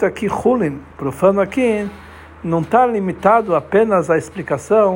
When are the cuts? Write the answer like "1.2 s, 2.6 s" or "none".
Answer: none